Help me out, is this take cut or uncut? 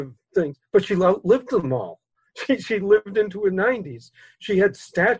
uncut